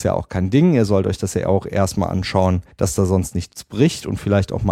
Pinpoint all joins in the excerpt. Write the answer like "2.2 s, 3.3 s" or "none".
2.7 s